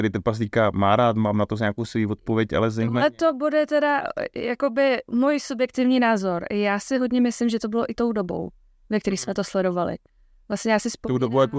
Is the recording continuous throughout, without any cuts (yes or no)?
yes